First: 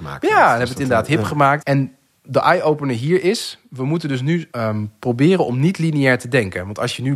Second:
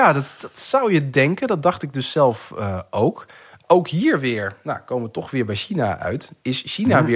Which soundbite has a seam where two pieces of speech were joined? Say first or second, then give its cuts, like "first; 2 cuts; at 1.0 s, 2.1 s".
first; 2 cuts; at 1.6 s, 4.5 s